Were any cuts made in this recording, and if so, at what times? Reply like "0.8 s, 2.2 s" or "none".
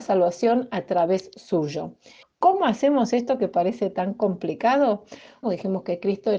2.2 s, 5.4 s

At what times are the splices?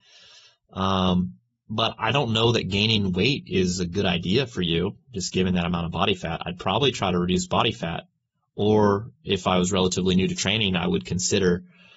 none

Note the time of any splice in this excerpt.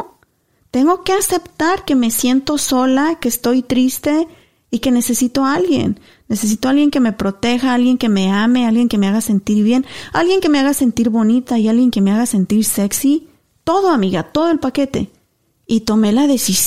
none

